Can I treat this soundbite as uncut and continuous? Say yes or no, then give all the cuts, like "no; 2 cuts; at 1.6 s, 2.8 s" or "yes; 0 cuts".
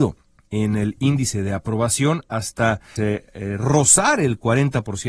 no; 1 cut; at 3.0 s